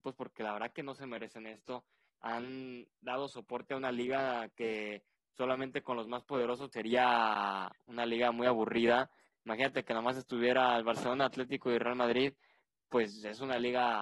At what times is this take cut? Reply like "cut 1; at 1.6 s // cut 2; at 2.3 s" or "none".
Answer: cut 1; at 6.7 s